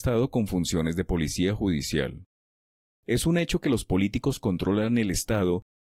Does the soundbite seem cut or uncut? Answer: cut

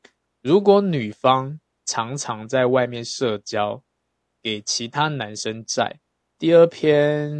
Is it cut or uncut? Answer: cut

